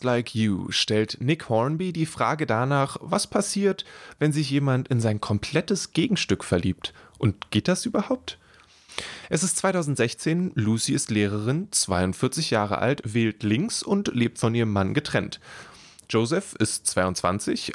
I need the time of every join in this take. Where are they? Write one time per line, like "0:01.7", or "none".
none